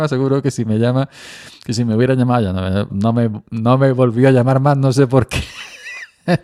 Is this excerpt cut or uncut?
cut